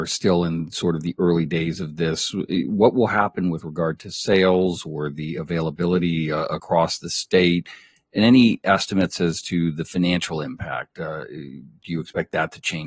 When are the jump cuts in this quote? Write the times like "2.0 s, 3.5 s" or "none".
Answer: none